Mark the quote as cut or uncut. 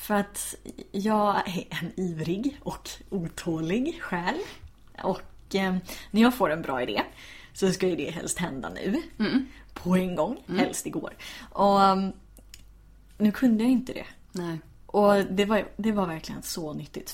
uncut